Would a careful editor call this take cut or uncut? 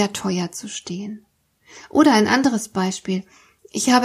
uncut